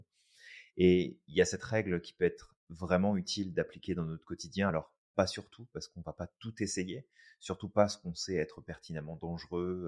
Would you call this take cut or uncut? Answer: uncut